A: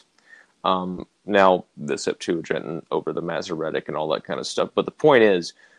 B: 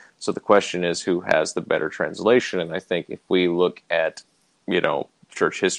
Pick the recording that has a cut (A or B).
A